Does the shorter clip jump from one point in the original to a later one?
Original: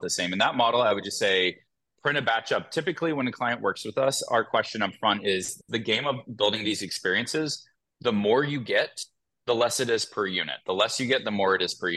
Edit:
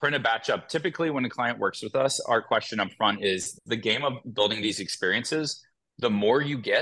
no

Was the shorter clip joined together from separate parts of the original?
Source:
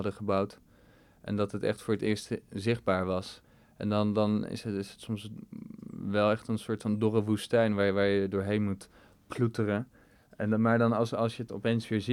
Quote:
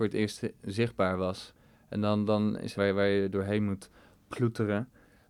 yes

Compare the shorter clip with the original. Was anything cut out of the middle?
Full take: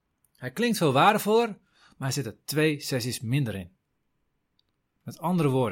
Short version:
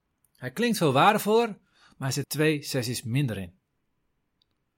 yes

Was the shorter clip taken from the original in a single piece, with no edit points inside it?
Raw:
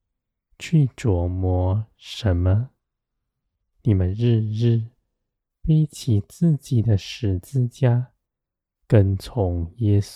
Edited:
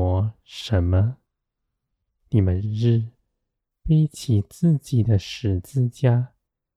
no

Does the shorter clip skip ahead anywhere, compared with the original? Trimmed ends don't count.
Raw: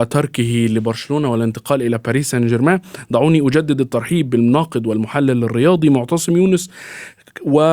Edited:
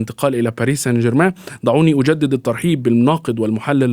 no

